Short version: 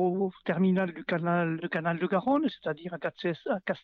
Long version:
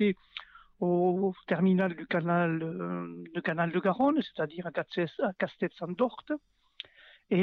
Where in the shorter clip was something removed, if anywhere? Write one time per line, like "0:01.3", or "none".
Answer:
0:01.6